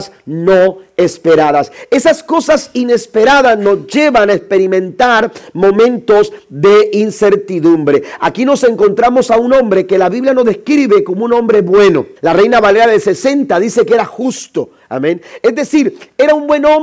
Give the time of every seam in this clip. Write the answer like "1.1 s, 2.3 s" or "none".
12.2 s